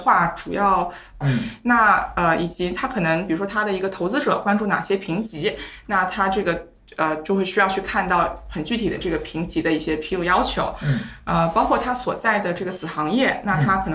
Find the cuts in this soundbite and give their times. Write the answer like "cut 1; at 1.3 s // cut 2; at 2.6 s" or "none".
cut 1; at 1.2 s